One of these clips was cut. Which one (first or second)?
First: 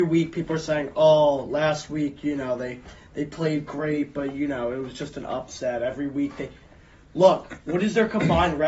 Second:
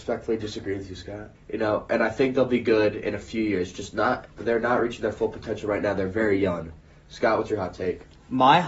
second